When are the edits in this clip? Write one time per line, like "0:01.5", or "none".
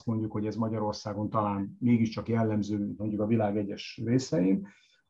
none